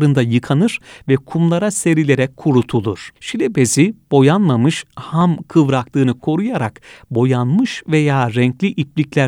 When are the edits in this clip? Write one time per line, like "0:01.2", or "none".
0:03.2